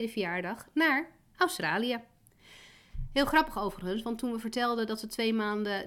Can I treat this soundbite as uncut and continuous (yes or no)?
yes